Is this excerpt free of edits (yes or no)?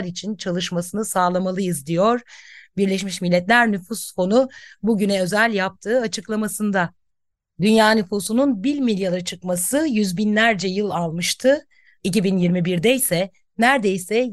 no